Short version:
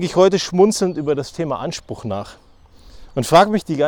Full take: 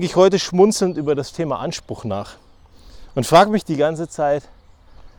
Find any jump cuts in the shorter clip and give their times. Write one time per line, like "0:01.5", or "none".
none